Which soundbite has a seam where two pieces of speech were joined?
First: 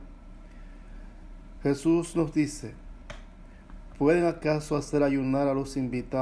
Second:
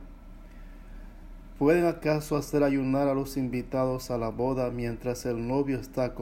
second; 1 cut; at 1.6 s

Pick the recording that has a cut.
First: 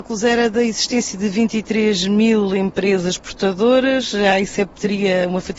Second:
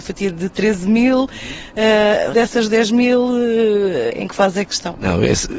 second; 2 cuts; at 2.3 s, 4.1 s

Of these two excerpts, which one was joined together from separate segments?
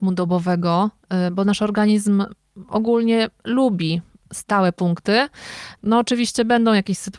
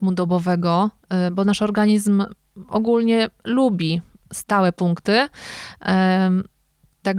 first; 1 cut; at 5.8 s

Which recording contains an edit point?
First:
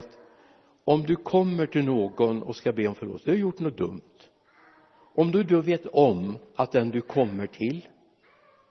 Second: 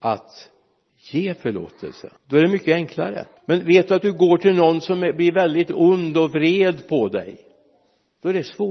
second; 2 cuts; at 2.2 s, 3.4 s

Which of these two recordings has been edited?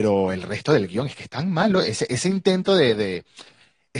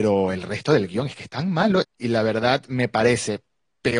second; 1 cut; at 1.8 s

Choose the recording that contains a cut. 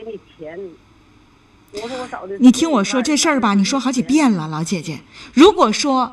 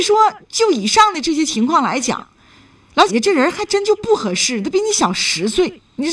second; 1 cut; at 3.1 s

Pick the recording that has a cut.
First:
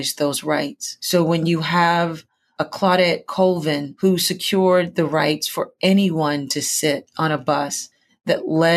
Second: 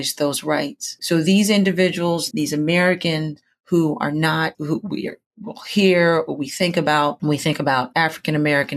second; 3 cuts; at 1.0 s, 2.3 s, 4.5 s

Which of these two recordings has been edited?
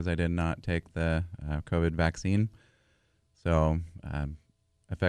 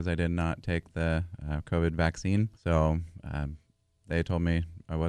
second; 2 cuts; at 2.5 s, 4.0 s

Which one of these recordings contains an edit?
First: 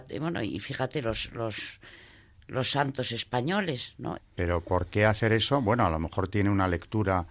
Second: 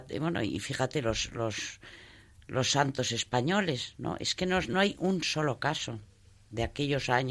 first; 1 cut; at 4.2 s

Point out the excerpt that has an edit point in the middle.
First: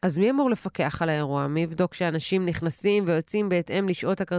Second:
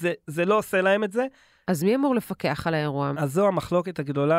second; 1 cut; at 3.1 s

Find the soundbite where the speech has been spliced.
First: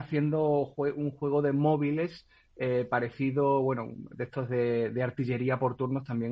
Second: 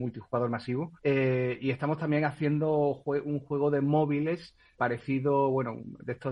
second; 2 cuts; at 1.0 s, 4.8 s

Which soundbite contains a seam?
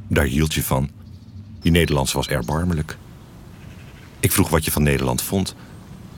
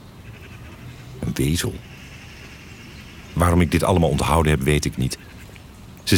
first; 1 cut; at 1.6 s

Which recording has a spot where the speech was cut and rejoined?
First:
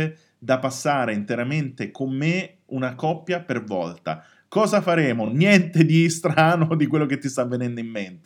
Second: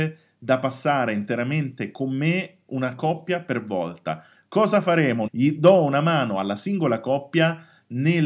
second; 1 cut; at 5.3 s

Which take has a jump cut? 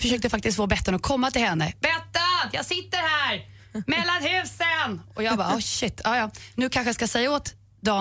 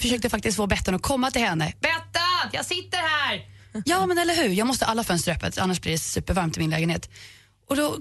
second; 1 cut; at 3.8 s

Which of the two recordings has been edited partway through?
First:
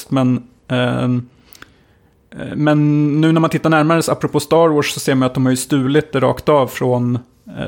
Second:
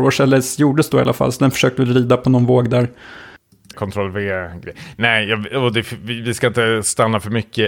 second; 1 cut; at 3.7 s

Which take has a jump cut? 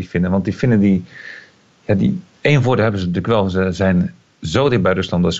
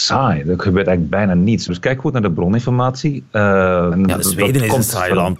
second; 2 cuts; at 1.7 s, 3.9 s

